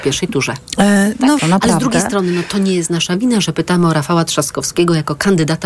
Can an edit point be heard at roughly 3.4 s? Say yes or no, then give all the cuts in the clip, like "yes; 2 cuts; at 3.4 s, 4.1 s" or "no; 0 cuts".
no; 1 cut; at 1.4 s